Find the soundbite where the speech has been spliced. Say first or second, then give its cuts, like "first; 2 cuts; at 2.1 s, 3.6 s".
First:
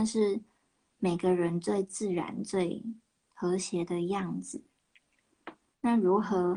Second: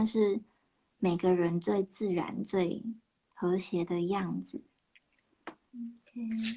second; 1 cut; at 5.7 s